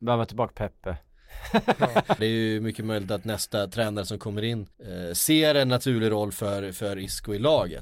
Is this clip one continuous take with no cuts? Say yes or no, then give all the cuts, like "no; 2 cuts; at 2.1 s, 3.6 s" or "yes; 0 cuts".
no; 2 cuts; at 2.2 s, 4.7 s